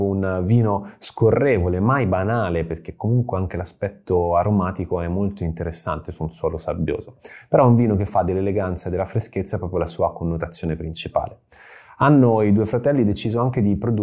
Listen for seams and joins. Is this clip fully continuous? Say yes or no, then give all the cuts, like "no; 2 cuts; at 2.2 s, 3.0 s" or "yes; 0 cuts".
yes; 0 cuts